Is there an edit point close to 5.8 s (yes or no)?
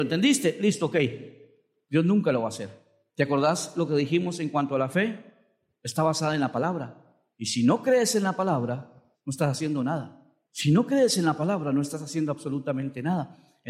no